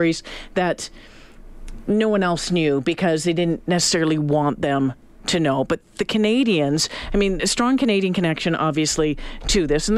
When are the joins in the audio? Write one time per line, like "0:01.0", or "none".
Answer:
0:07.4